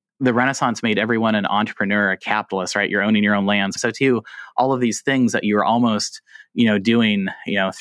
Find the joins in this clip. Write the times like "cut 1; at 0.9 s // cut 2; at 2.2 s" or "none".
cut 1; at 3.8 s